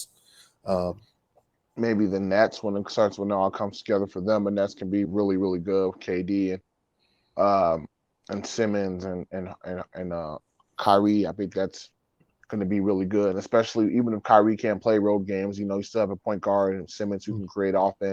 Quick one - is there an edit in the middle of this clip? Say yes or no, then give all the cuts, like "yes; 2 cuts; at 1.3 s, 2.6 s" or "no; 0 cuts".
yes; 1 cut; at 5.1 s